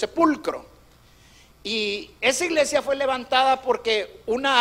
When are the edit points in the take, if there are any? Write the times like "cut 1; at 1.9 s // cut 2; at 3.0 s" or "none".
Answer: none